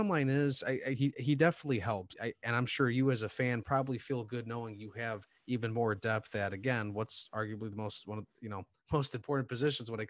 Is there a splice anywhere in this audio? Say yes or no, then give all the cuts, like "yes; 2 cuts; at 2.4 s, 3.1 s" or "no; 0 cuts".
yes; 1 cut; at 2.1 s